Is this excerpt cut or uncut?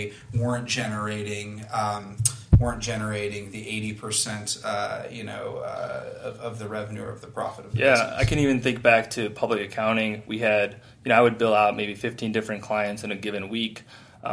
uncut